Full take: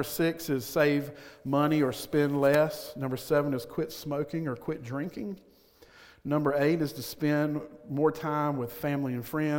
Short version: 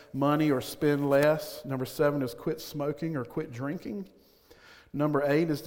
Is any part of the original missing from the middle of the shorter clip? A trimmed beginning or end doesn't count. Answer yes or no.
no